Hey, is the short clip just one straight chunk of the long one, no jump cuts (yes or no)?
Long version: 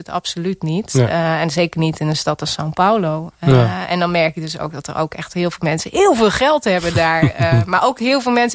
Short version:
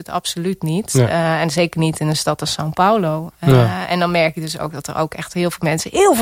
yes